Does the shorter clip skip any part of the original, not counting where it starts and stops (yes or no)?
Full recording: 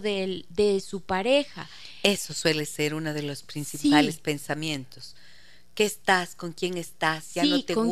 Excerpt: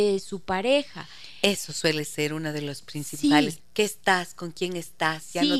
yes